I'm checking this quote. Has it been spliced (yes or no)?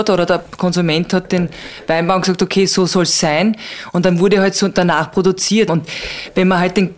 yes